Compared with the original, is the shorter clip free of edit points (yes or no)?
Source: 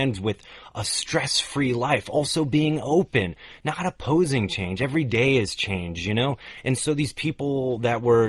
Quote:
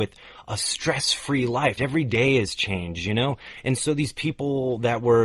no